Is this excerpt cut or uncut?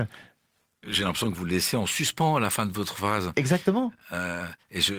uncut